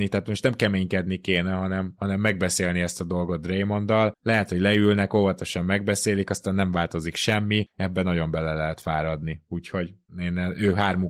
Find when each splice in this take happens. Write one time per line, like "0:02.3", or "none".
none

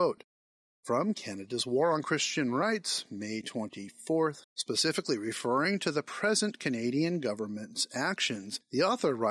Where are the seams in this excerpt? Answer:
0:04.4

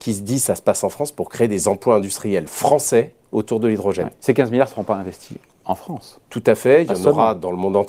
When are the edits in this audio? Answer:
none

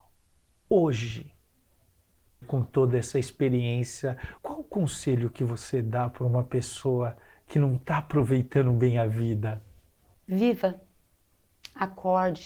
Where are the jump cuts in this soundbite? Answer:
0:02.4
0:04.4

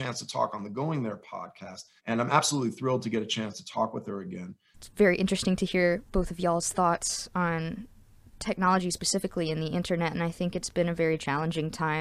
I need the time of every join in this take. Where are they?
0:02.0
0:04.7

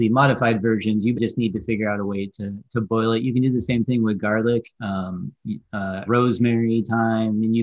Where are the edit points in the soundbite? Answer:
0:01.1
0:04.7
0:06.1

